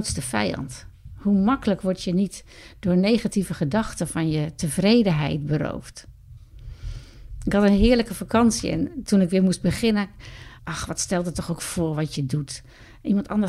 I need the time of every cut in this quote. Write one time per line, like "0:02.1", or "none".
0:10.6